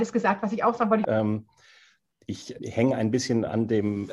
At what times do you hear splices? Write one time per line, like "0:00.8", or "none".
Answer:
0:01.0
0:02.6